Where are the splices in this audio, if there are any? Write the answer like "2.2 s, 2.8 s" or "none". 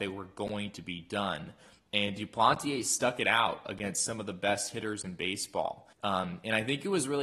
5.9 s